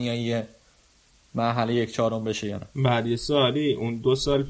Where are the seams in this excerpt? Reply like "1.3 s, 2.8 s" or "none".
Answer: 2.7 s